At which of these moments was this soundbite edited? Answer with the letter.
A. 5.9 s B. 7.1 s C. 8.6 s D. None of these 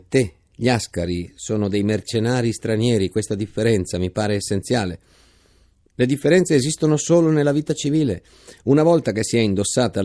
A